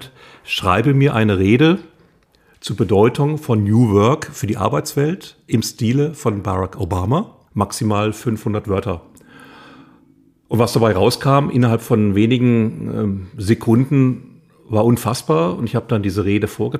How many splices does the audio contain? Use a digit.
1